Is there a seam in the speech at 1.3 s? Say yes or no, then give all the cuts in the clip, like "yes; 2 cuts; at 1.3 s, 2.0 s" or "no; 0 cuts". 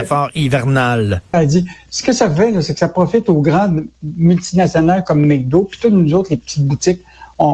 yes; 1 cut; at 1.3 s